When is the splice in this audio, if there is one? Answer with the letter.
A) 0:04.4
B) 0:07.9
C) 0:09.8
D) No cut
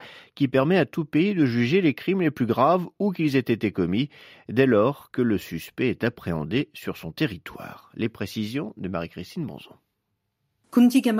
D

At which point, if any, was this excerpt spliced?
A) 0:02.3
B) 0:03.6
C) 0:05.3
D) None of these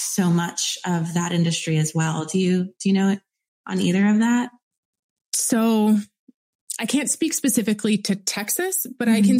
C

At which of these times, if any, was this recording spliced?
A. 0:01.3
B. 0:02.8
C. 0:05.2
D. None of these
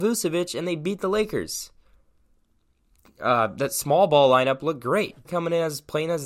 C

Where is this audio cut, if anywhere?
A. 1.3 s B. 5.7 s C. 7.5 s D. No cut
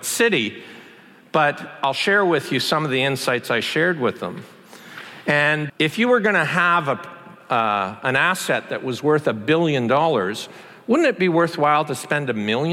B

